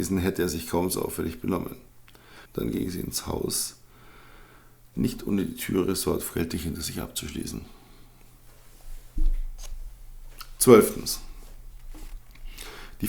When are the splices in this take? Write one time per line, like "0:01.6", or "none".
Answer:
0:02.5